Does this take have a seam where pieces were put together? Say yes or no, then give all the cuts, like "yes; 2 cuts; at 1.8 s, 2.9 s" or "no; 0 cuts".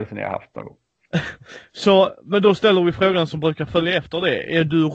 yes; 1 cut; at 1.0 s